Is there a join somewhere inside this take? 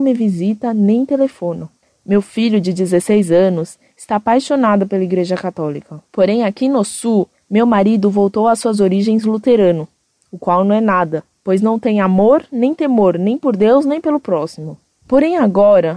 yes; 2 cuts; at 6.0 s, 7.3 s

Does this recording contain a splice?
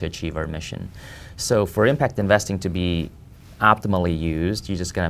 no; 0 cuts

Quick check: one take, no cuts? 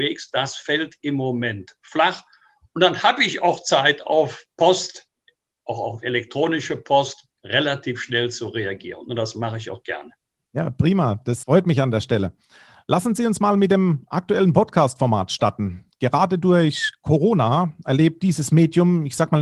yes; 0 cuts

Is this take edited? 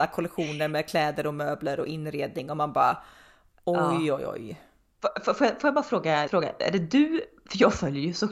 yes; 1 cut; at 6.3 s

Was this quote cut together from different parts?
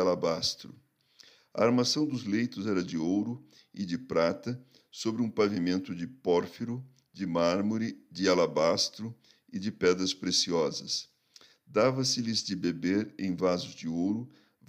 no; 0 cuts

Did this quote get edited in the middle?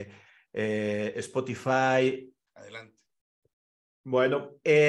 yes; 1 cut; at 2.5 s

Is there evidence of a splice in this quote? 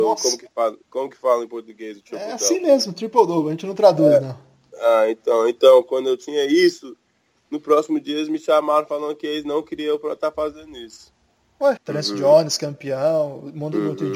yes; 1 cut; at 11.8 s

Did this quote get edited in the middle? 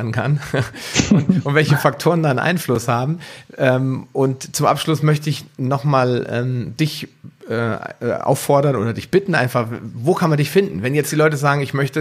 no; 0 cuts

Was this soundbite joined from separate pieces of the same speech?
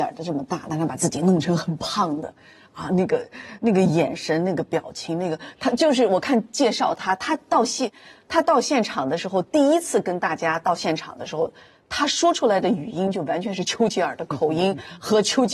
no; 0 cuts

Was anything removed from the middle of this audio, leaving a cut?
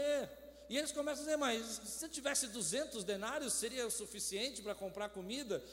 no; 0 cuts

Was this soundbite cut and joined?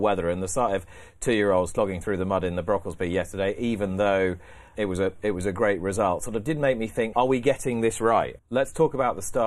yes; 3 cuts; at 4.7 s, 7.1 s, 8.4 s

